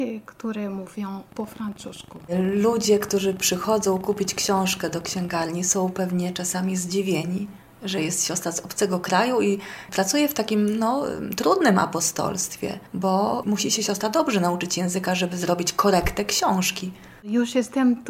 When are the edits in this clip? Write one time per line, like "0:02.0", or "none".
0:12.9